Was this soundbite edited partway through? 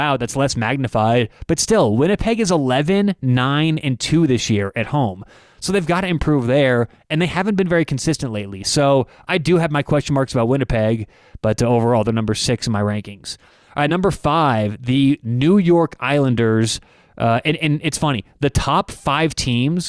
no; 0 cuts

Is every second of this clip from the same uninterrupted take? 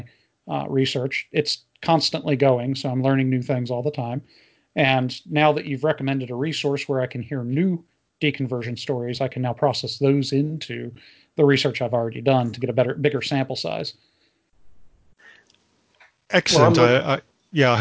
yes; 0 cuts

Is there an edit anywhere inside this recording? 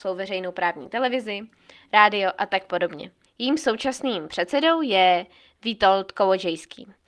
yes; 1 cut; at 3.3 s

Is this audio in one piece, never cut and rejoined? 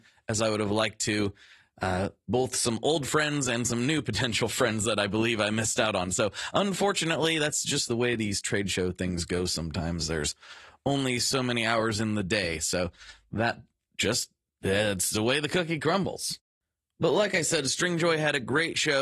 yes; 0 cuts

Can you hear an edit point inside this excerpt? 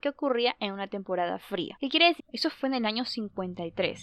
yes; 1 cut; at 2.2 s

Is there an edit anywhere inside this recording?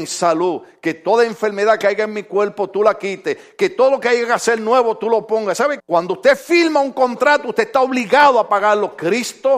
yes; 1 cut; at 5.8 s

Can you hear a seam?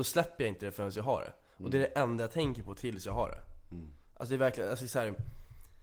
no; 0 cuts

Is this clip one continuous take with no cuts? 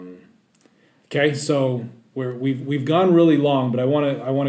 yes; 0 cuts

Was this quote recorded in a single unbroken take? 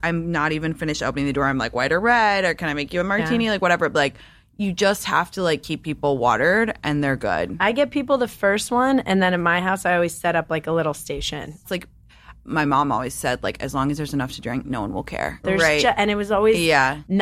no; 2 cuts; at 11.6 s, 15.4 s

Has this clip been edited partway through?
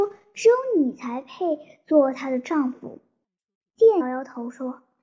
yes; 1 cut; at 4.0 s

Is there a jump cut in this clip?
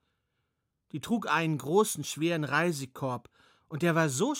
no; 0 cuts

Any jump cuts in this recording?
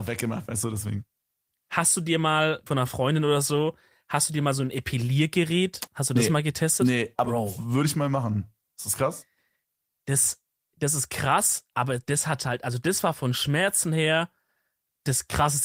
yes; 1 cut; at 2.7 s

